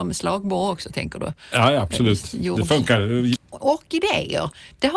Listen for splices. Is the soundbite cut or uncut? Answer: cut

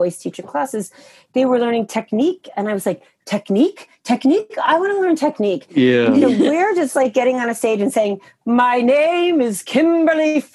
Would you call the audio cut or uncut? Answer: uncut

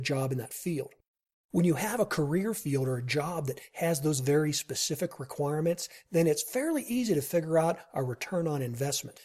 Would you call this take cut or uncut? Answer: uncut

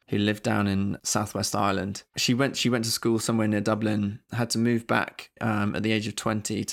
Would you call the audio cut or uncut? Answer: cut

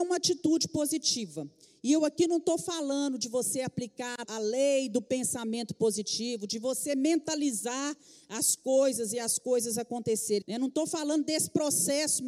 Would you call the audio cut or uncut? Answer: cut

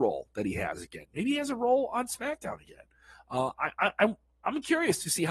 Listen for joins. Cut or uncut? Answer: uncut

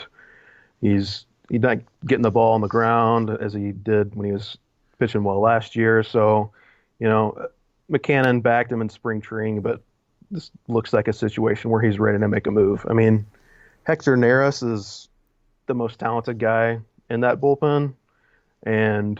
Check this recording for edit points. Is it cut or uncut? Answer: uncut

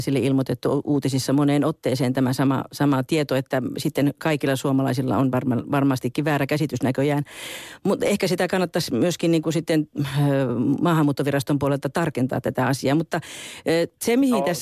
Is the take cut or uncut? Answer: uncut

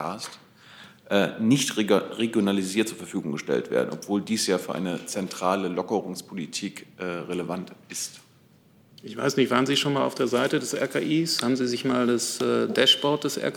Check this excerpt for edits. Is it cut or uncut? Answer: uncut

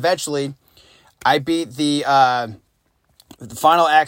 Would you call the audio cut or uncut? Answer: uncut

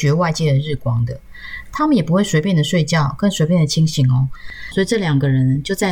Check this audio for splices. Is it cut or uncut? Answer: cut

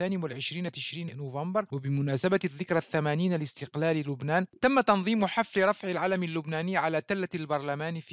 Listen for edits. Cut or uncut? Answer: cut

